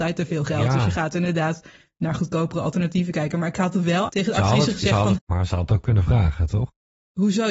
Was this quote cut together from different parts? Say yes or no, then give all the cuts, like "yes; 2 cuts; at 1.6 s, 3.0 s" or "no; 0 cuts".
yes; 1 cut; at 5.1 s